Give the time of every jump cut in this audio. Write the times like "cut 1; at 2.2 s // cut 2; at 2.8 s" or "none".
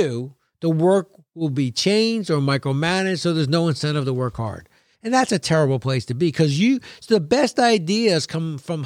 cut 1; at 4.9 s